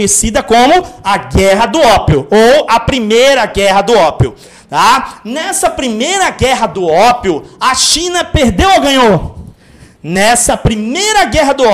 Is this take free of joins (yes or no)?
yes